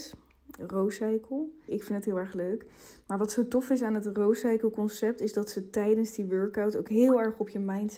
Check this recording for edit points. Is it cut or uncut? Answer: cut